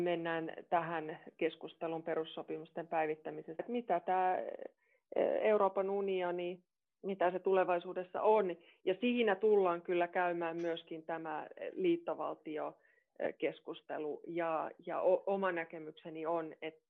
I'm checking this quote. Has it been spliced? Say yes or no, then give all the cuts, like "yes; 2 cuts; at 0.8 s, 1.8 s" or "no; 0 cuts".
yes; 1 cut; at 3.6 s